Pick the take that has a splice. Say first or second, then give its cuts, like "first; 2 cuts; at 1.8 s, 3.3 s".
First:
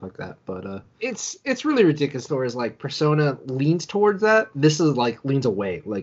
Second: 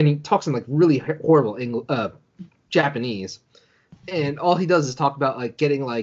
first; 2 cuts; at 1.0 s, 2.3 s